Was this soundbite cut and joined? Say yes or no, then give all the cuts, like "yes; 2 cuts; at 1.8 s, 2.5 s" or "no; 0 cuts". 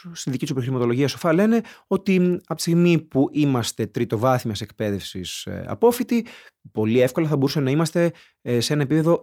no; 0 cuts